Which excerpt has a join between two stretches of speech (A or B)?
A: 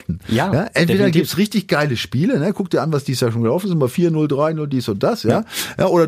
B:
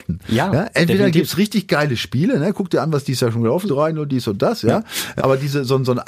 B